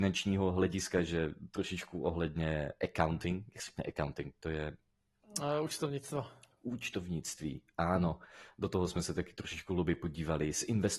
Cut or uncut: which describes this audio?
uncut